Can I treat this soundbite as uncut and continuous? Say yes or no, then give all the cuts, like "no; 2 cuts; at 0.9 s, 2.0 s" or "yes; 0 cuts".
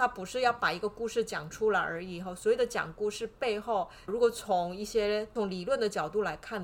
no; 1 cut; at 4.1 s